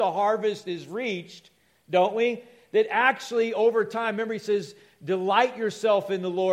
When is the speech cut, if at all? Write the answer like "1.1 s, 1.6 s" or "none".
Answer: none